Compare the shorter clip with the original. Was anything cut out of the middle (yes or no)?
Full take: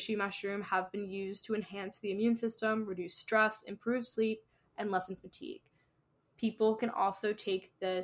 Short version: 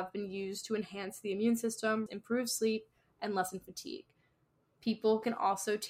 yes